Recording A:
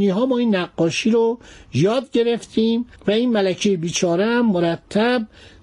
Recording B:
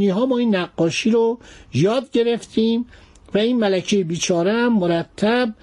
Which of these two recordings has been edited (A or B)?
A